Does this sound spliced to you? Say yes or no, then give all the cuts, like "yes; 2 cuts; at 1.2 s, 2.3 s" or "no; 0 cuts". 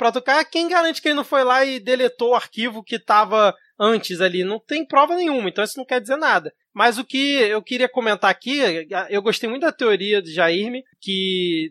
no; 0 cuts